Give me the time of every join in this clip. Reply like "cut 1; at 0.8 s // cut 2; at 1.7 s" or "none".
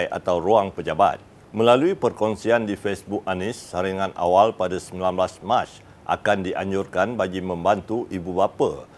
cut 1; at 1.4 s